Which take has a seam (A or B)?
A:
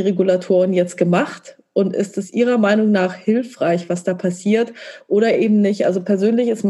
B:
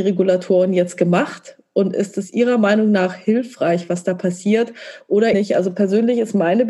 B